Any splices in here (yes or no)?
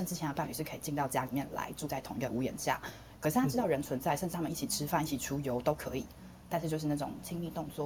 yes